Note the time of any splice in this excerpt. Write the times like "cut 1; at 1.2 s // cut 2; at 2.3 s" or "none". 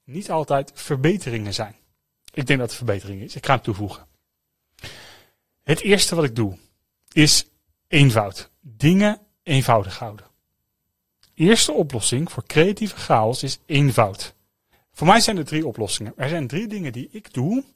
cut 1; at 2.2 s // cut 2; at 14.7 s